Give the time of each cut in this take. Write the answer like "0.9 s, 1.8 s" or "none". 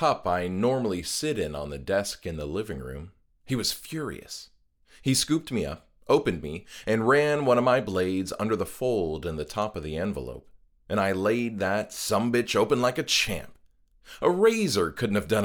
none